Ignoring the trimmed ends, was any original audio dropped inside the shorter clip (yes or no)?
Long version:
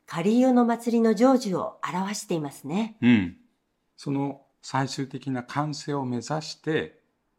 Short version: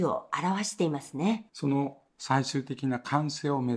yes